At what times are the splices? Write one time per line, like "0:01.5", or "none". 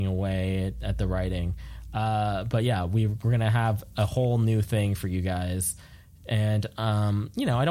none